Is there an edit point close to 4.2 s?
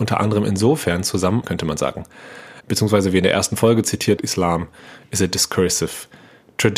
yes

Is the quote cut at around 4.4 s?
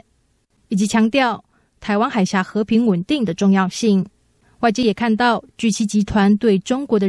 yes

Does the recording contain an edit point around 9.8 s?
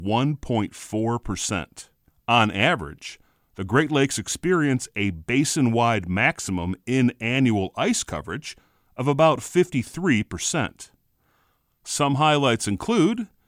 no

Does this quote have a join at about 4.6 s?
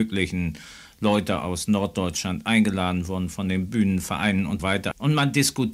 yes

